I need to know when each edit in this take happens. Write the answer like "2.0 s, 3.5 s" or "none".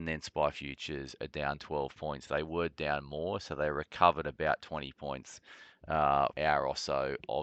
6.3 s